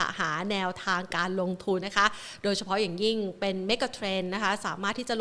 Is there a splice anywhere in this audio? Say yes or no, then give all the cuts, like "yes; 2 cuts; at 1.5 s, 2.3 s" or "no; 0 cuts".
yes; 1 cut; at 1.8 s